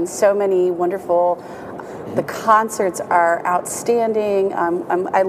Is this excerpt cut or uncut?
cut